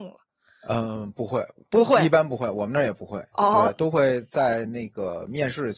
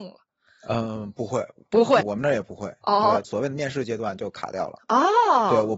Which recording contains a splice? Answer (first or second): second